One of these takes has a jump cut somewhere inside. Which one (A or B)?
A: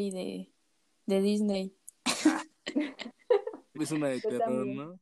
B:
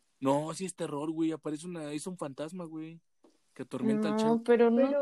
A